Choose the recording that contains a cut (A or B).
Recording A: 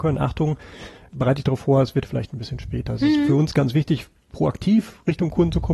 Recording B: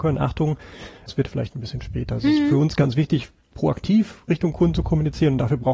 B